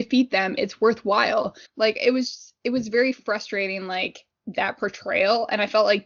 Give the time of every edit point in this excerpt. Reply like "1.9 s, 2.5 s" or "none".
1.6 s